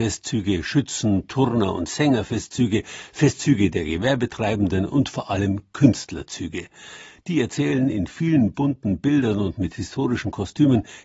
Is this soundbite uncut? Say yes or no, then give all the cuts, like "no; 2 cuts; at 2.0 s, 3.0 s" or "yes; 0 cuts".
yes; 0 cuts